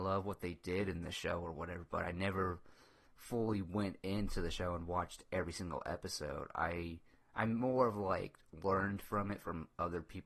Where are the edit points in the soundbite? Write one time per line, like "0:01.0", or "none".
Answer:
none